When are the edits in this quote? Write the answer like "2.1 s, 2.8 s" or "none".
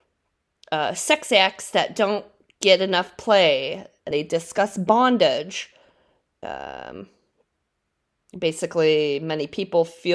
4.1 s, 6.4 s